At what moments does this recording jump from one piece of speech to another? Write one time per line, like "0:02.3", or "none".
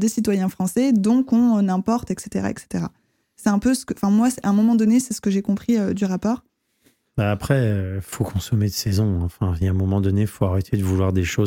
none